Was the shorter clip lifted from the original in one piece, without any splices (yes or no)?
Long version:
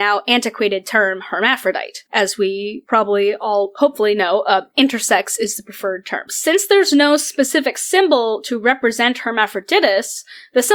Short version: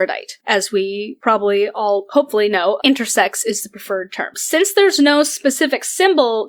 no